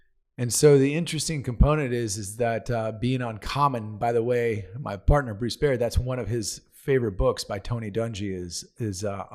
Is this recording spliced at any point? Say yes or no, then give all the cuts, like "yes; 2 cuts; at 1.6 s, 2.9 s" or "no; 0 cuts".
no; 0 cuts